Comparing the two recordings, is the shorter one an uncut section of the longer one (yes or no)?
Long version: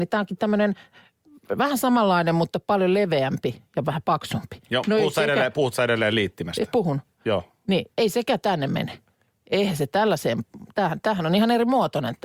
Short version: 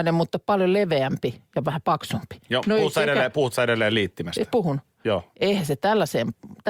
no